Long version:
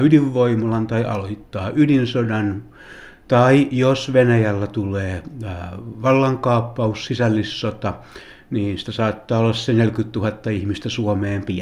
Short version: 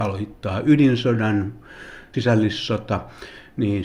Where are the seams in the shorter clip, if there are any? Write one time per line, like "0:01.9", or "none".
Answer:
0:02.1